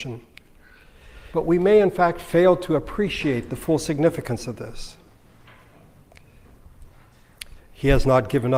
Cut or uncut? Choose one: cut